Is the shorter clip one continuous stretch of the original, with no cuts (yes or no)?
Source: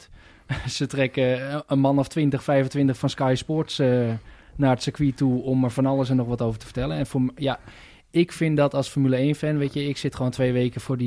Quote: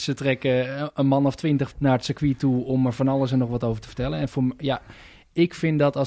no